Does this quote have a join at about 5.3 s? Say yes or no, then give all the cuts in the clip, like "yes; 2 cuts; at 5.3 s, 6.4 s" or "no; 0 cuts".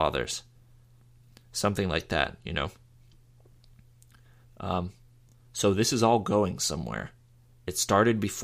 no; 0 cuts